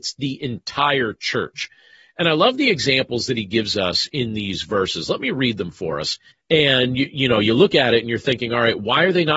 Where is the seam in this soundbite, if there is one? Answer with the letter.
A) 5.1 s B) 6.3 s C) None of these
B